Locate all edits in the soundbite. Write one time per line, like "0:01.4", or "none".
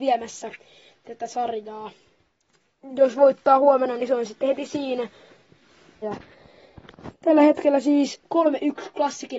0:06.0
0:07.1